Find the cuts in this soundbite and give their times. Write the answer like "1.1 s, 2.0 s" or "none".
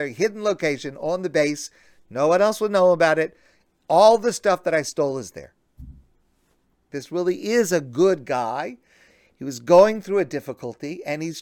6.9 s